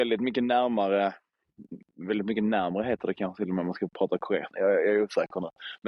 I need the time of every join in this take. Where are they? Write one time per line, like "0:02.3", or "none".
0:04.5